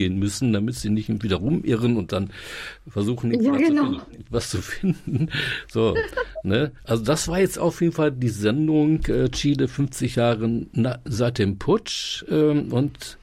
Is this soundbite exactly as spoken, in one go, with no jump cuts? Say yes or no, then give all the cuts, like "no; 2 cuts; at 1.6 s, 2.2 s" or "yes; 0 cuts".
yes; 0 cuts